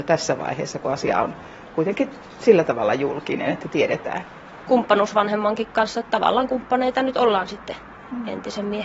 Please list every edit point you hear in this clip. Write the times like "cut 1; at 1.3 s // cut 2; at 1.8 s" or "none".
cut 1; at 4.7 s

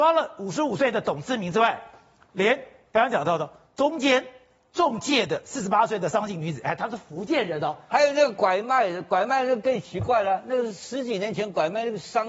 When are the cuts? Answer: cut 1; at 7.9 s

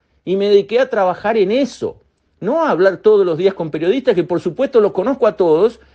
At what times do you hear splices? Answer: none

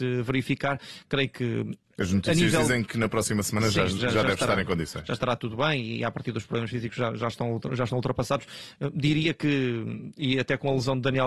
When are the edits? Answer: none

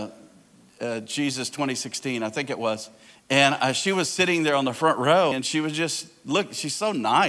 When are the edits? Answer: cut 1; at 3.1 s // cut 2; at 5.3 s

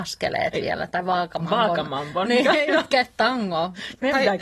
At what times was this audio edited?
none

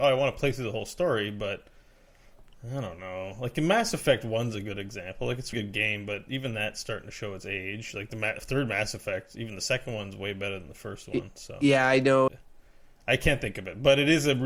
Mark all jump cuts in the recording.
cut 1; at 5.5 s // cut 2; at 12.3 s

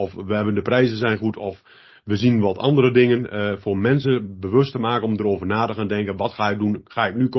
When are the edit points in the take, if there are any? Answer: none

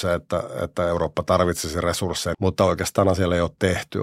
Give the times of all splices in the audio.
cut 1; at 2.3 s

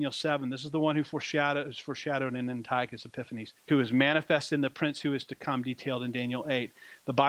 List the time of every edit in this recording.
cut 1; at 3.6 s

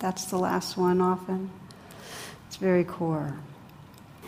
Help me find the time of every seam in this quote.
none

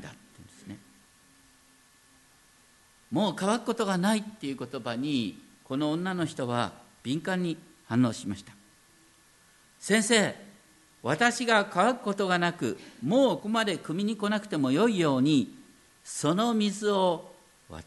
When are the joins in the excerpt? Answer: cut 1; at 13.4 s

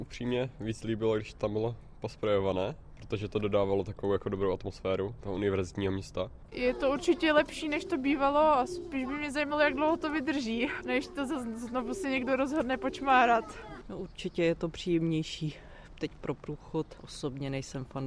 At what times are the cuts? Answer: cut 1; at 6.5 s

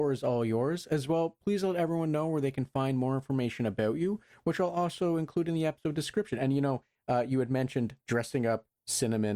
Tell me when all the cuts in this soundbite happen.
none

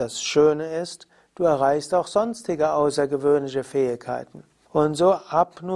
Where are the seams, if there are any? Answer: cut 1; at 4.6 s

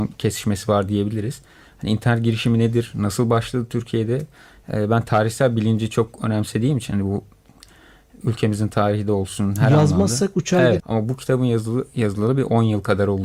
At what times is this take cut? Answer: cut 1; at 10.8 s

